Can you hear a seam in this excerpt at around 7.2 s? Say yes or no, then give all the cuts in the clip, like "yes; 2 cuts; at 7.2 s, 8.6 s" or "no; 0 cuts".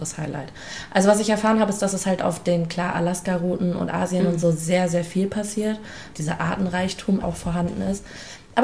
yes; 2 cuts; at 6.1 s, 7.2 s